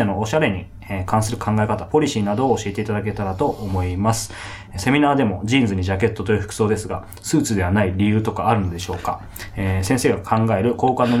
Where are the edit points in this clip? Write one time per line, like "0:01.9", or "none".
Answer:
none